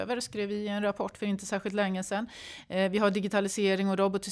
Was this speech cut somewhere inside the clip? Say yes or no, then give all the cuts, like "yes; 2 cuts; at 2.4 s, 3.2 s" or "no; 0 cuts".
no; 0 cuts